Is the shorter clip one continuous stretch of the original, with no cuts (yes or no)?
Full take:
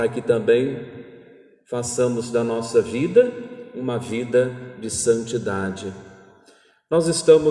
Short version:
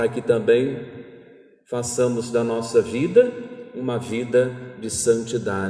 yes